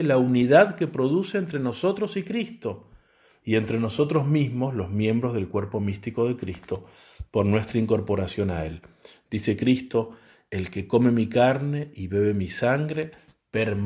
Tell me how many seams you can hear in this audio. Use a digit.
0